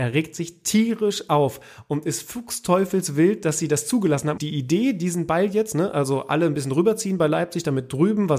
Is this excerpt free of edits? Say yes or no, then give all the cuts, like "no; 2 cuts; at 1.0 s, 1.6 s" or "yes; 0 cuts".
no; 1 cut; at 4.4 s